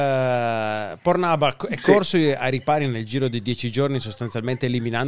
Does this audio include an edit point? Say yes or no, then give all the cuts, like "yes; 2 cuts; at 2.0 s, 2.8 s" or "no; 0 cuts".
no; 0 cuts